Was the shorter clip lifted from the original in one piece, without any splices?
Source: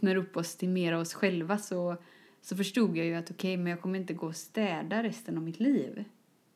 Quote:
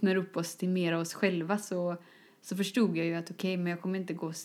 yes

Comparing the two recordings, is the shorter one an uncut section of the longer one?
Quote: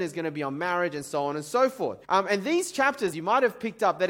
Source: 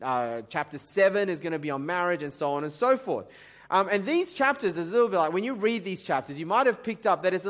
no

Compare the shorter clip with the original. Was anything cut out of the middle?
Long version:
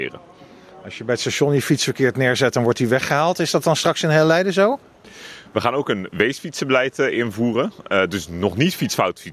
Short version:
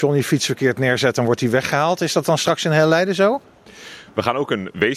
no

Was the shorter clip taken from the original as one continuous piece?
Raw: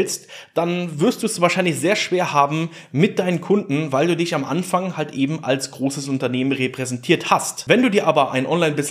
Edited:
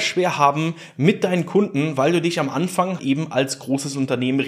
no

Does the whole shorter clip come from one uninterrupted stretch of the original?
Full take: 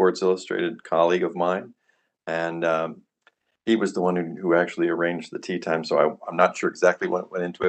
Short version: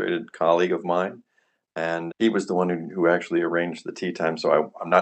no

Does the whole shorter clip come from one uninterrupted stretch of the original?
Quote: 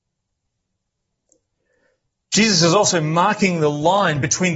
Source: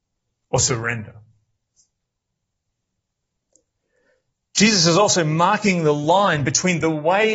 yes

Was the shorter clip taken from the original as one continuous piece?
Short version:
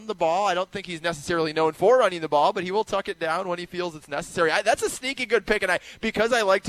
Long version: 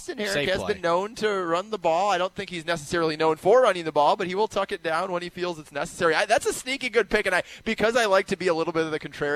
yes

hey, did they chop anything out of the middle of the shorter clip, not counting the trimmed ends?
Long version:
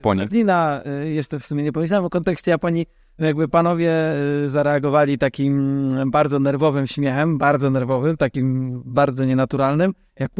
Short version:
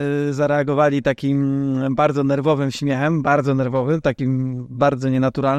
no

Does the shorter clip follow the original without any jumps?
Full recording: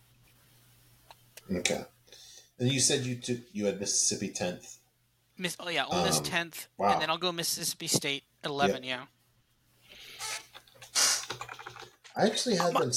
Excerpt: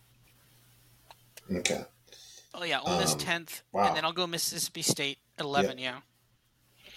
no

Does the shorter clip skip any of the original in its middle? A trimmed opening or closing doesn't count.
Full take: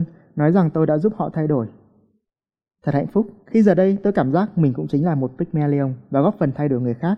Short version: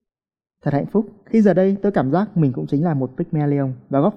no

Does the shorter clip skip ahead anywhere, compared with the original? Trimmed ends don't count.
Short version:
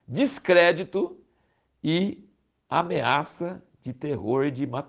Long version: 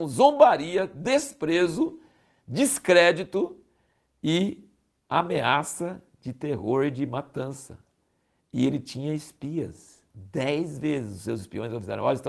no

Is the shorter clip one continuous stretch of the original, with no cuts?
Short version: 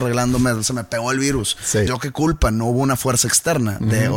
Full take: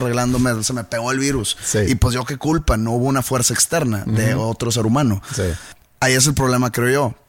no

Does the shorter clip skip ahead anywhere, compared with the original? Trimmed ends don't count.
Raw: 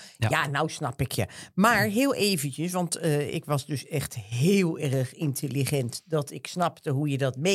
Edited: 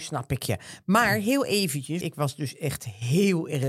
yes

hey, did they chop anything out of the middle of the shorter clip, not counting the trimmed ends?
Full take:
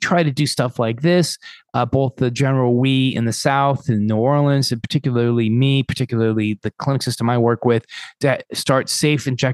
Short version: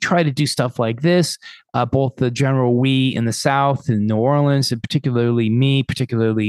no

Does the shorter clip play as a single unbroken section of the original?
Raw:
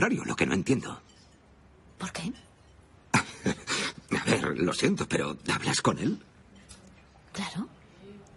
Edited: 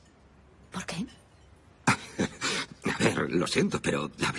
yes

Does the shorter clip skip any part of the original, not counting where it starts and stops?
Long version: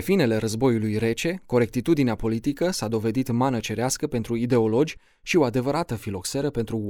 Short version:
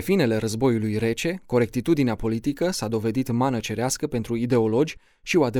no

